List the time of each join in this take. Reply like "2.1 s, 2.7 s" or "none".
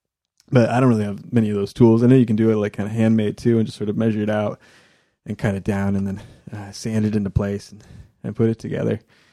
none